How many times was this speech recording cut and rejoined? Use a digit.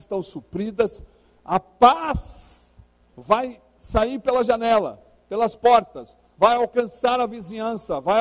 1